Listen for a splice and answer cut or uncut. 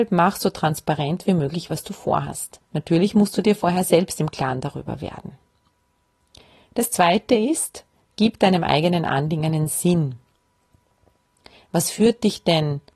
cut